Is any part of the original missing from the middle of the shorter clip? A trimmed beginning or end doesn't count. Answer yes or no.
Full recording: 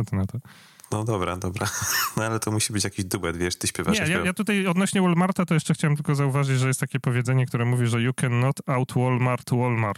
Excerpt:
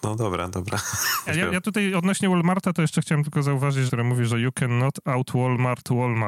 yes